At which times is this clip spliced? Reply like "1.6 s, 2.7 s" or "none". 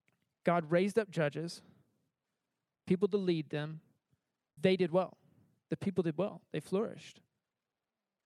4.6 s